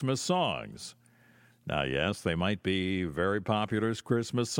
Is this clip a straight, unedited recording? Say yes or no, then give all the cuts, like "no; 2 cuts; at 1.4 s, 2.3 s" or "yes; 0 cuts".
yes; 0 cuts